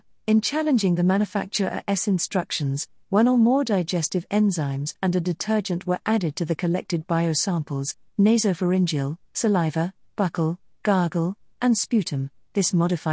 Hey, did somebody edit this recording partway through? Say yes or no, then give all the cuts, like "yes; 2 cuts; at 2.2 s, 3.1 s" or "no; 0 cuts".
yes; 1 cut; at 9.2 s